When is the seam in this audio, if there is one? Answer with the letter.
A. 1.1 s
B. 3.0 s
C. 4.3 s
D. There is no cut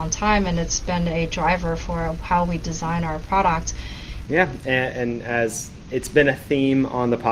C